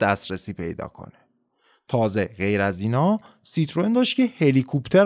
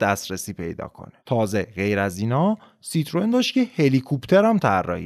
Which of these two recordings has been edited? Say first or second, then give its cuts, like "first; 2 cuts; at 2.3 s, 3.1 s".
second; 1 cut; at 1.2 s